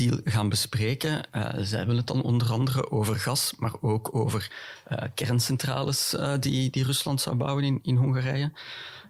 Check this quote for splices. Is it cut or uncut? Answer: uncut